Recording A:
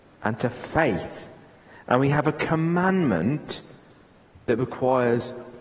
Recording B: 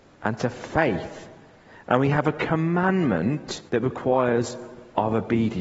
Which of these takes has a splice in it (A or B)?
B